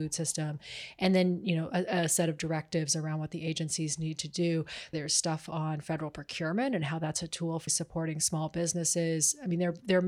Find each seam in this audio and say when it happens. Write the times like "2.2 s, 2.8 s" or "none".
4.9 s, 7.7 s